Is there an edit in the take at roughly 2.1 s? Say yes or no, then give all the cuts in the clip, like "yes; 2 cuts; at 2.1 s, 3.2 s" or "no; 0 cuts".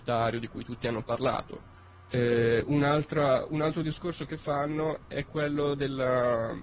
yes; 1 cut; at 2.1 s